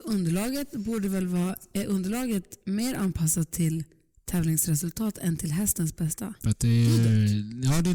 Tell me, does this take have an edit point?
yes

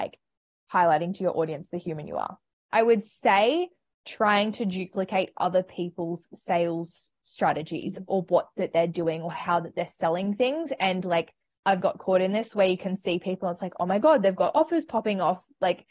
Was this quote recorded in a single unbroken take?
no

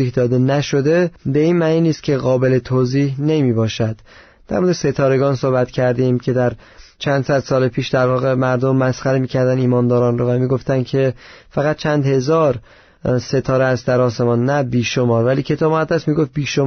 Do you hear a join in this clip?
yes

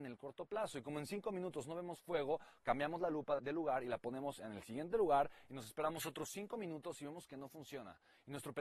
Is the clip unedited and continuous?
no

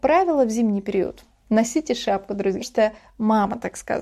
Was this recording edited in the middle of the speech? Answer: yes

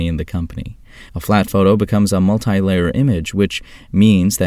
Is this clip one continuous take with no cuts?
no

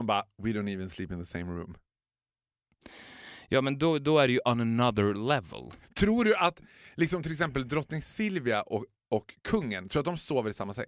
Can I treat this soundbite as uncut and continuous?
yes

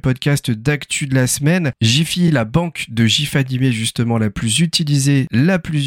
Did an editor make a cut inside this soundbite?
no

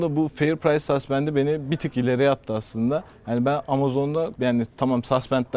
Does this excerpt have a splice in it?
no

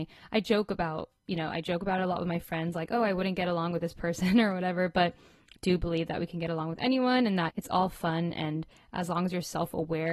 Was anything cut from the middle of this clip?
yes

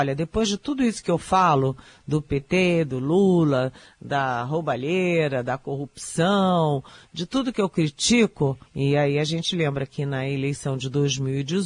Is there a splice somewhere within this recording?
yes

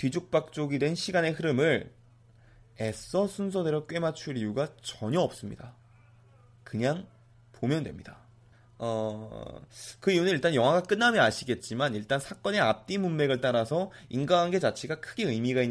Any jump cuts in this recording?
no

